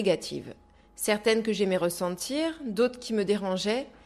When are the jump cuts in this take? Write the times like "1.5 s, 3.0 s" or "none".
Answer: none